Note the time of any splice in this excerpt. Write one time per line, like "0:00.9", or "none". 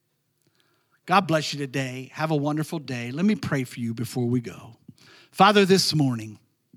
none